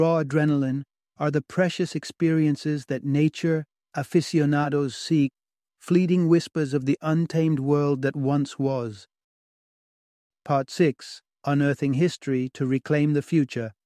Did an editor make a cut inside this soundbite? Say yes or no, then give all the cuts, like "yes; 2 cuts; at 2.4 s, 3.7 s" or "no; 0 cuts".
no; 0 cuts